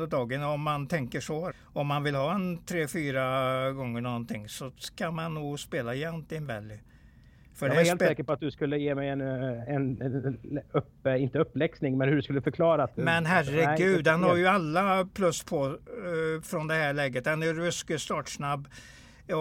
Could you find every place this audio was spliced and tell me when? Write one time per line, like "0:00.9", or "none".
0:01.5